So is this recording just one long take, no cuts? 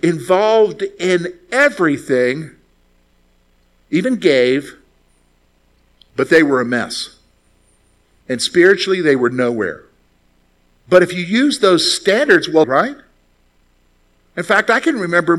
no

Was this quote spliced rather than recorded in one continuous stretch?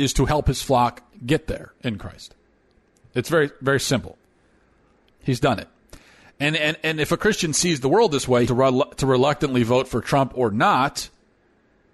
yes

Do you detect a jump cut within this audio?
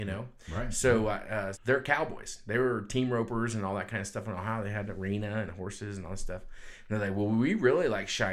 yes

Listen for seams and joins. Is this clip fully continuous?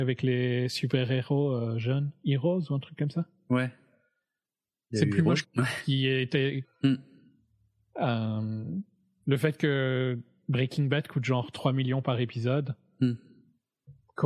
no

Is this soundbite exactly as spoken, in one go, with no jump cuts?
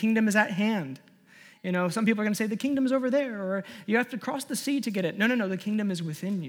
yes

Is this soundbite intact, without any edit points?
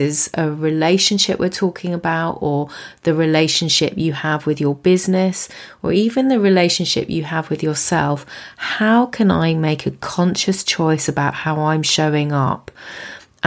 yes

